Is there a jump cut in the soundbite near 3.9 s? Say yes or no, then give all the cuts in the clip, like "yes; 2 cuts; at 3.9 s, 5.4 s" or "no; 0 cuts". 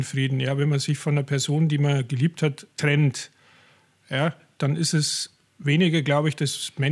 no; 1 cut; at 2.7 s